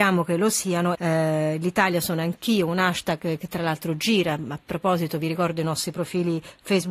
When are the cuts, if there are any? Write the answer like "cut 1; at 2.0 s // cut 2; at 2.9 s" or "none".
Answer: cut 1; at 0.9 s